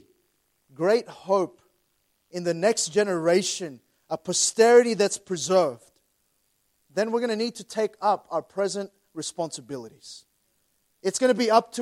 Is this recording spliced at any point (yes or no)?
no